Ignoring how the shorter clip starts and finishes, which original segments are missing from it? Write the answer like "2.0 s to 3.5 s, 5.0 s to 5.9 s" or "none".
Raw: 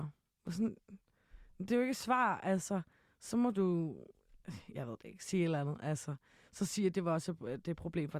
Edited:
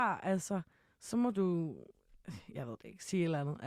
none

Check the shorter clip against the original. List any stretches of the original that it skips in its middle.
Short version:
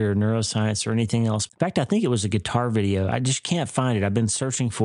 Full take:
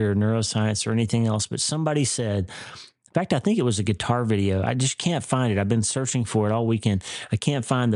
1.5 s to 3.0 s

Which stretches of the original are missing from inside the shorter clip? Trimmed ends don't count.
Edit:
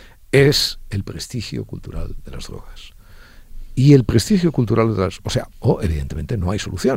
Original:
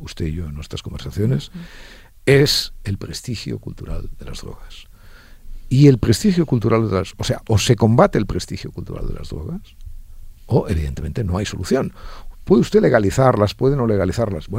7.4 s to 10.4 s

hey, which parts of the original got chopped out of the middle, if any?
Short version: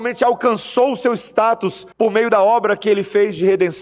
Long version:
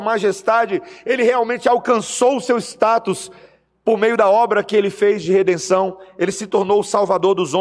3.4 s to 3.8 s

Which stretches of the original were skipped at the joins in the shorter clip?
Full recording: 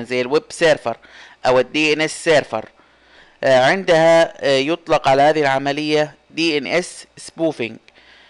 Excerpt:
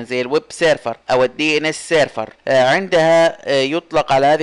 1.0 s to 1.4 s, 2.7 s to 3.3 s

